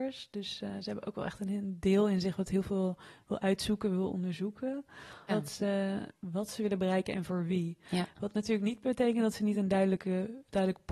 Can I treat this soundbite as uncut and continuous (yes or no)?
no